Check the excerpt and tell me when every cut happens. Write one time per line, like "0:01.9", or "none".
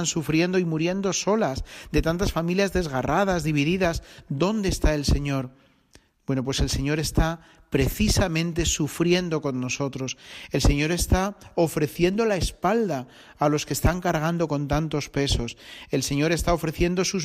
none